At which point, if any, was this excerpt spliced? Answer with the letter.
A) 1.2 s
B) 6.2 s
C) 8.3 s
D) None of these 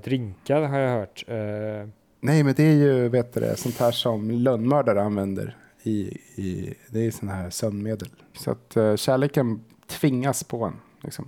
C